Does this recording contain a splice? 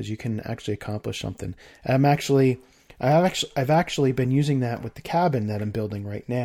no; 0 cuts

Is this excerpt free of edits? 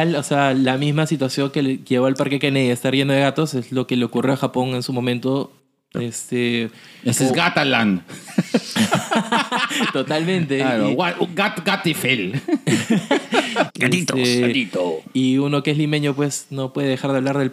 no; 2 cuts; at 5.9 s, 13.7 s

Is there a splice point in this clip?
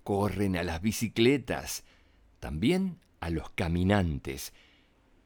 no; 0 cuts

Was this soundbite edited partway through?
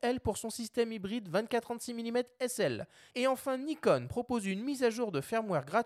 yes; 1 cut; at 3.1 s

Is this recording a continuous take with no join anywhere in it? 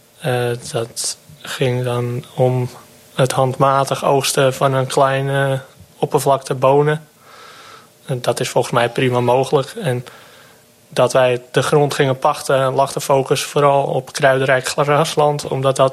yes; 0 cuts

